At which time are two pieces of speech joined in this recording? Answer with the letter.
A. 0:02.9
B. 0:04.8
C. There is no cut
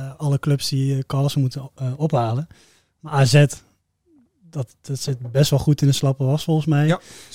B